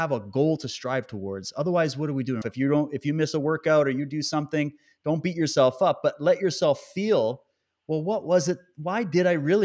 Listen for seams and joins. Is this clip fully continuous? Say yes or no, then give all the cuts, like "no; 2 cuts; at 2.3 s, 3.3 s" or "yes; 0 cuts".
no; 1 cut; at 2.4 s